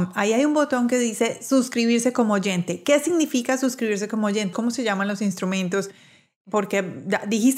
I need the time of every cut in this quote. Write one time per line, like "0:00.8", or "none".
0:04.5

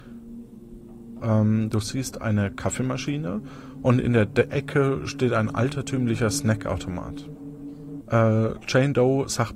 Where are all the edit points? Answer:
0:01.2
0:08.0

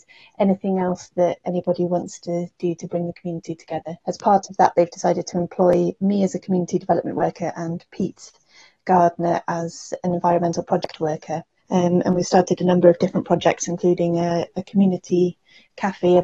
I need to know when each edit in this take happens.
0:04.0
0:11.6

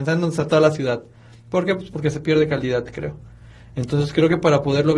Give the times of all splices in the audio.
none

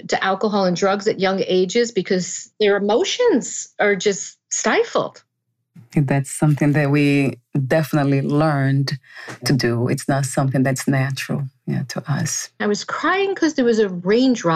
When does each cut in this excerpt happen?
0:02.5
0:12.6

